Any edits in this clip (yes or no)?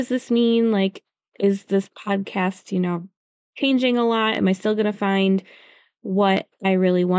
no